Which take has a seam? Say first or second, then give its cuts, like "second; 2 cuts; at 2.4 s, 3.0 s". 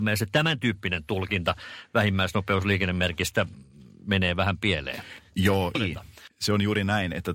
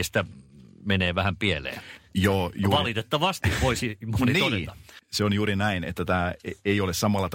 first; 1 cut; at 5.7 s